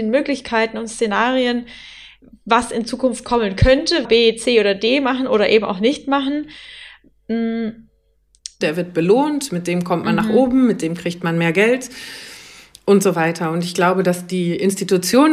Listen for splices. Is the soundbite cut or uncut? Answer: cut